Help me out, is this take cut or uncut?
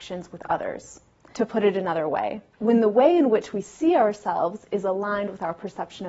cut